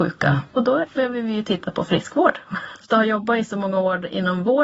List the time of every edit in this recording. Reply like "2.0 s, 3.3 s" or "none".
2.8 s